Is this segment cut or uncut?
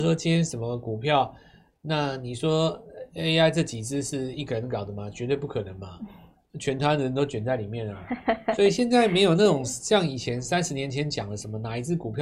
uncut